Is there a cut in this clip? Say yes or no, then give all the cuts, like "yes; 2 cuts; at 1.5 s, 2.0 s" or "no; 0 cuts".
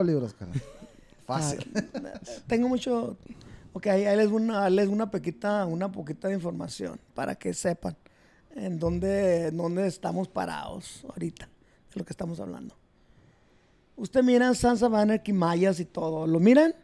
no; 0 cuts